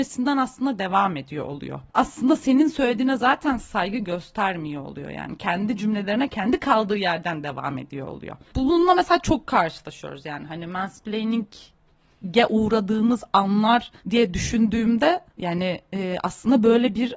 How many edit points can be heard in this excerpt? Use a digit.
2